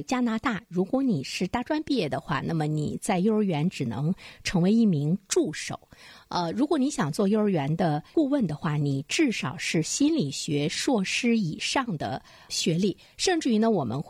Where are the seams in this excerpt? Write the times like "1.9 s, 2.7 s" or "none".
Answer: none